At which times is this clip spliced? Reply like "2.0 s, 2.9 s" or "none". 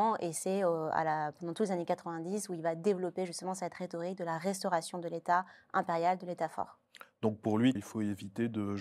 7.8 s

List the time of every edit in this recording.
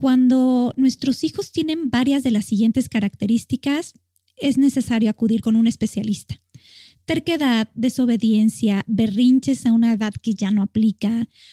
none

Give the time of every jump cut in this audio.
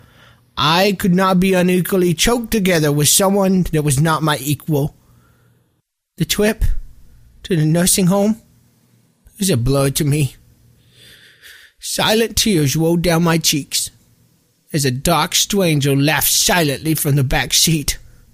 none

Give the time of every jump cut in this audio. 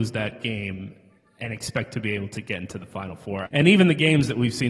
3.4 s

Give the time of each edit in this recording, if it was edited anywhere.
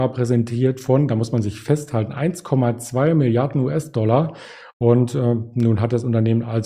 none

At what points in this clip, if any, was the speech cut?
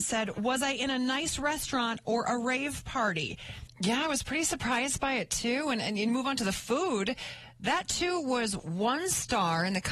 3.7 s

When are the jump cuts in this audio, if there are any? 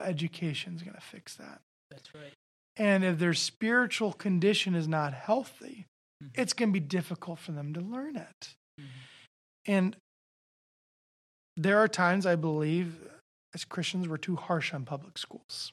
none

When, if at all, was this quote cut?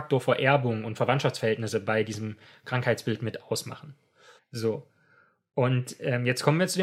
4.4 s

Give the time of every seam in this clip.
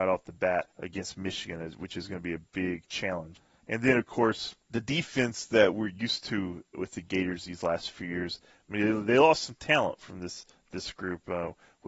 3.4 s

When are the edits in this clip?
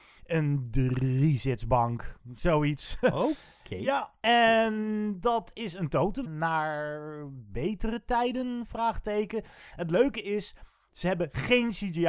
6.2 s

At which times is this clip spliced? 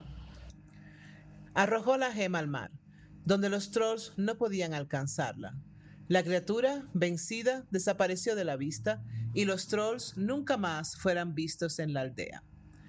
1.5 s

